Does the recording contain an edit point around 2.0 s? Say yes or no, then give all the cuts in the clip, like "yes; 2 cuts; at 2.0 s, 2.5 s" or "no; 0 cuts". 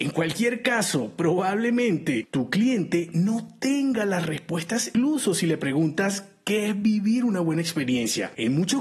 no; 1 cut; at 4.9 s